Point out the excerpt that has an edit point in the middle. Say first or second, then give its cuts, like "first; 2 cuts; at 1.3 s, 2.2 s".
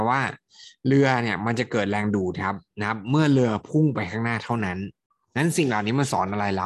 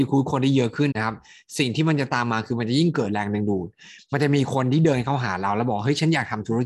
second; 1 cut; at 0.9 s